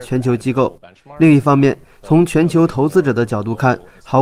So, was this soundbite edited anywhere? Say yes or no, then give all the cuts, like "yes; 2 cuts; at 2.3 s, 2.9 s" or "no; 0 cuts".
no; 0 cuts